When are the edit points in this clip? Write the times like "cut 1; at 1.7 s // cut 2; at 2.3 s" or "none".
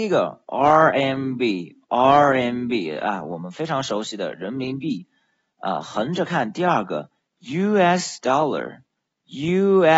none